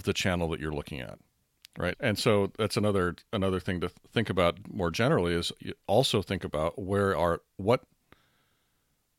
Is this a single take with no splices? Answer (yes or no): no